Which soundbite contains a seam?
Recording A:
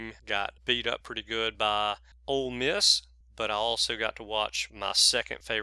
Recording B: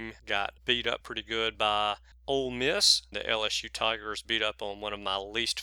B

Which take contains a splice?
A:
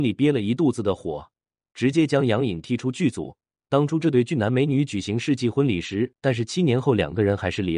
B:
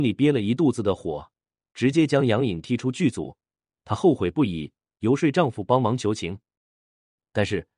A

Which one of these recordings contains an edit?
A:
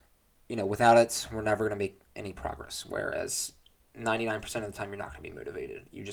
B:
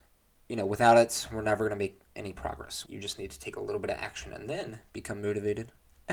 B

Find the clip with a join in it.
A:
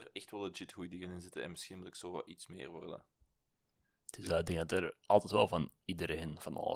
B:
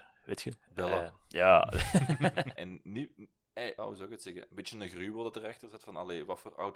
B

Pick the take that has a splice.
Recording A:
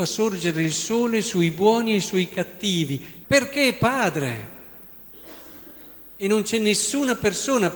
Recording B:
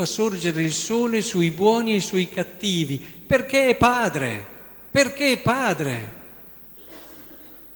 A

